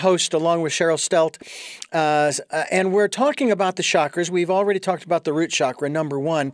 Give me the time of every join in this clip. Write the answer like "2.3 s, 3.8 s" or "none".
none

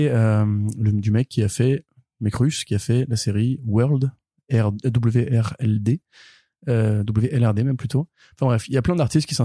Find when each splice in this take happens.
none

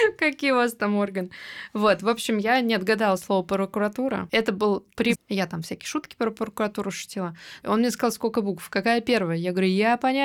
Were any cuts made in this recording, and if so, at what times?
5.1 s, 7.6 s

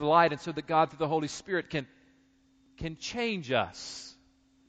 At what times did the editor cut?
none

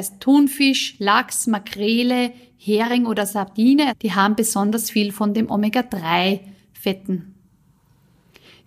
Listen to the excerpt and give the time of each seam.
3.9 s

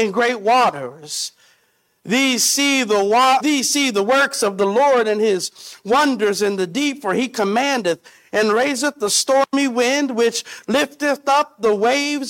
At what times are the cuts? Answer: 3.4 s

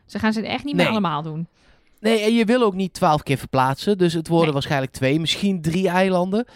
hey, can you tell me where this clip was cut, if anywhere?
none

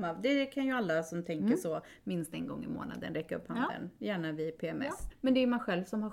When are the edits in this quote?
5.1 s

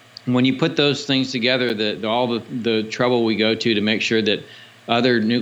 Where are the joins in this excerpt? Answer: 2.0 s

